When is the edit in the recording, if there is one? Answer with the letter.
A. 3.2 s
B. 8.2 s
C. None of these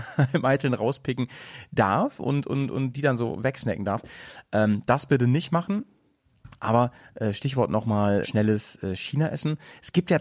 B